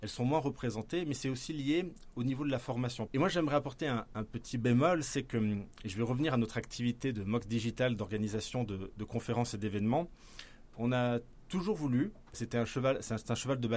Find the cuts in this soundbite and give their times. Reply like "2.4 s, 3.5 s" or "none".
3.1 s, 12.3 s